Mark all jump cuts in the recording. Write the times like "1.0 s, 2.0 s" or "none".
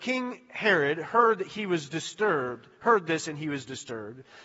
none